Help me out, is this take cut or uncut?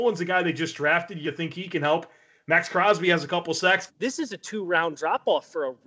cut